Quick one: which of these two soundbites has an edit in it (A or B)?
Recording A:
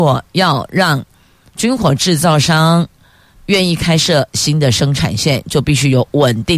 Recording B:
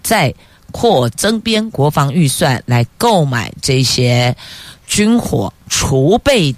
B